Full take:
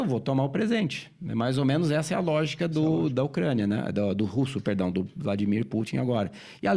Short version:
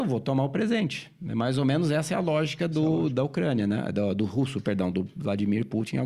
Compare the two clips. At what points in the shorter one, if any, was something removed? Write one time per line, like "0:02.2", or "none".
none